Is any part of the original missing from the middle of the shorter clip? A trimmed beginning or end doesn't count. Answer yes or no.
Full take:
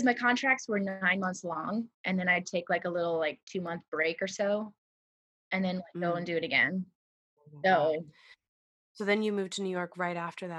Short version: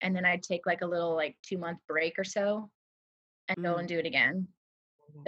yes